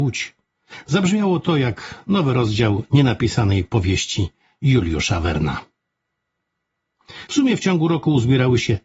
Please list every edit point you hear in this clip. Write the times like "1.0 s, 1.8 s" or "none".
7.3 s